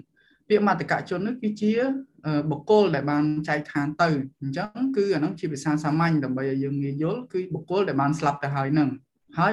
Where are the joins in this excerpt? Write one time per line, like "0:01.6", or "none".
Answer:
0:04.3